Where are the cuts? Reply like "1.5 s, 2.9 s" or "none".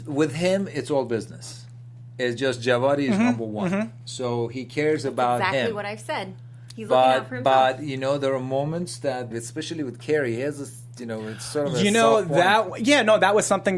9.3 s